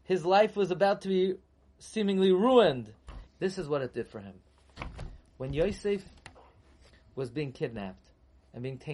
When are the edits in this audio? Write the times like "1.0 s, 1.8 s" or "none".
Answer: 3.3 s